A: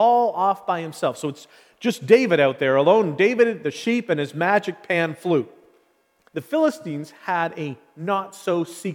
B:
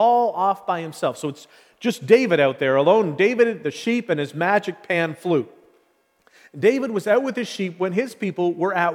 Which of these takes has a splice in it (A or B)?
A